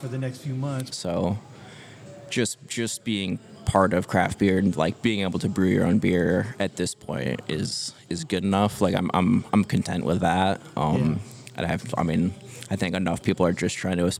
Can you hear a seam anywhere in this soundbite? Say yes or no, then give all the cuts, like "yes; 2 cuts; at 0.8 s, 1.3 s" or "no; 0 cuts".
yes; 1 cut; at 0.9 s